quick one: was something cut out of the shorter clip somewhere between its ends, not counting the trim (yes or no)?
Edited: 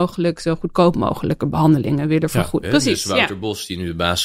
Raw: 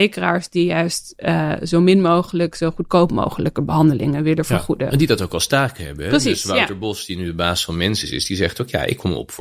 yes